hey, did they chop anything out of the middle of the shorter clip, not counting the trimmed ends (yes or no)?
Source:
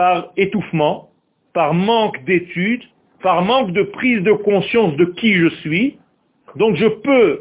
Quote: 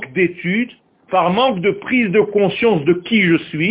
no